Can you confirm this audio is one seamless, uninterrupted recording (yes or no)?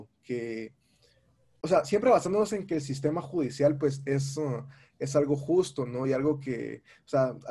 yes